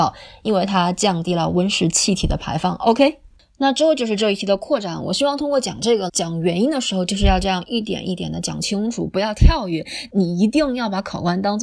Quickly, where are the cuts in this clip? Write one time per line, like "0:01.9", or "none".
0:06.1
0:10.1